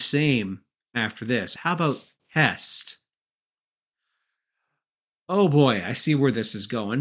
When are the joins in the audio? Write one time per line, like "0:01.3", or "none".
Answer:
0:01.6